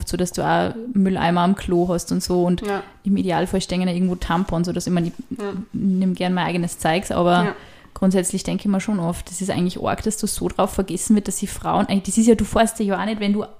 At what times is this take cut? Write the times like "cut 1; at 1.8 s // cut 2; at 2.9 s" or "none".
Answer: none